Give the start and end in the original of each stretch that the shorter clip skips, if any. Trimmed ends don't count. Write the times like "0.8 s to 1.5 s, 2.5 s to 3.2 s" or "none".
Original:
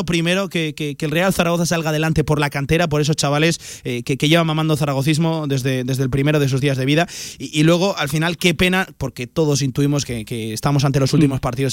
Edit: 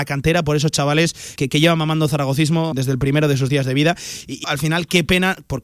3.8 s to 4.0 s, 5.4 s to 5.8 s, 7.6 s to 7.9 s